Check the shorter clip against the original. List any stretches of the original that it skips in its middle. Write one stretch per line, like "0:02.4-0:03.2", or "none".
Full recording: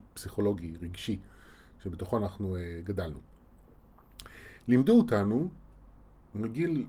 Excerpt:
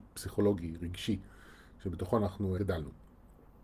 0:02.6-0:02.9